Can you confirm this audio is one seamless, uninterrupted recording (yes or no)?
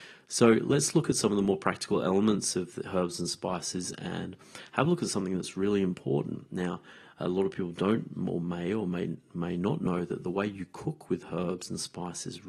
yes